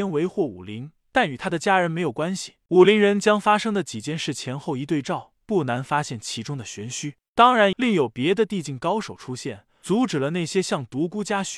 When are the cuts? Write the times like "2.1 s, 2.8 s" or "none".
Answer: 2.7 s, 7.7 s